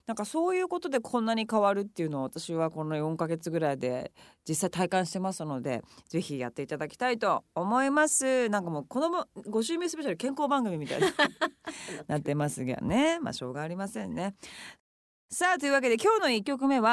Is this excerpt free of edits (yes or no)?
yes